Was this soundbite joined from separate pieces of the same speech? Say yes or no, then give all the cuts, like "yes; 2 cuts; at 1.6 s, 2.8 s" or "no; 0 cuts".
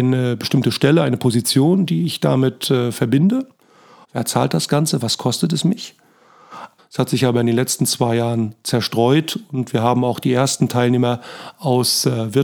yes; 2 cuts; at 4.0 s, 6.8 s